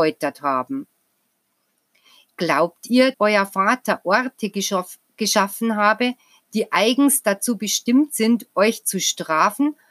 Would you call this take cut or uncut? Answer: cut